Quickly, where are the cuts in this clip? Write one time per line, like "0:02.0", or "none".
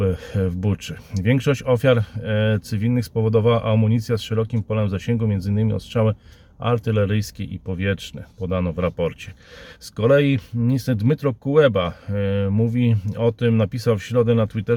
none